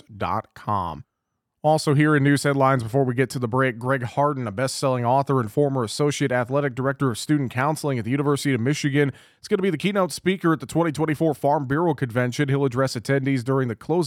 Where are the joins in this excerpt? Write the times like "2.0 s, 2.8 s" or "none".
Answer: none